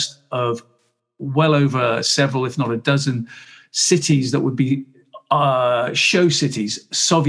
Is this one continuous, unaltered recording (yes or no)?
yes